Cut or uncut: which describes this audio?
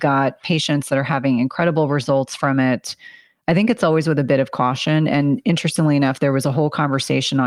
uncut